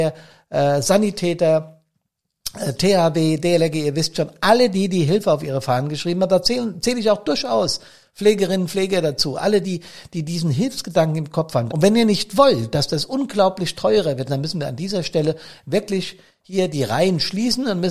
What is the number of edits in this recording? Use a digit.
3